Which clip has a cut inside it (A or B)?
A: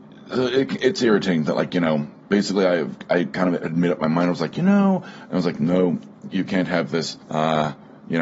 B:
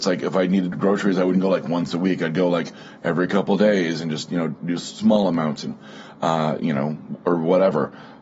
A